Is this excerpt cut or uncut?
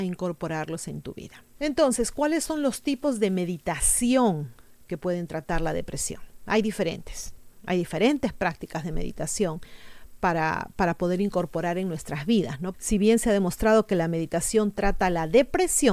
cut